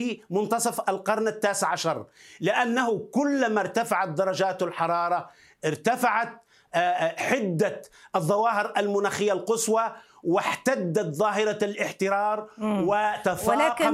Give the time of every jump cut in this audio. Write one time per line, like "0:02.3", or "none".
none